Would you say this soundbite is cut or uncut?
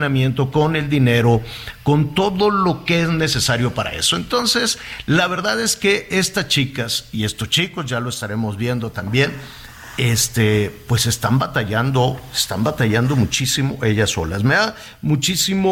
uncut